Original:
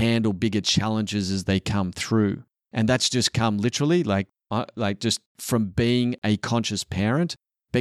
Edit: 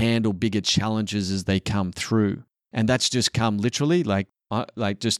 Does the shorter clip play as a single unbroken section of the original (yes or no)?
yes